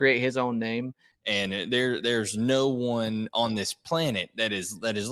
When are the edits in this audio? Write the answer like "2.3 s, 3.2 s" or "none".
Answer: 1.1 s